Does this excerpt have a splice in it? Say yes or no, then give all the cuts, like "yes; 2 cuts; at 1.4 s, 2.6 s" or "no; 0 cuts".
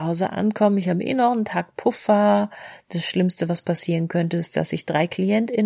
no; 0 cuts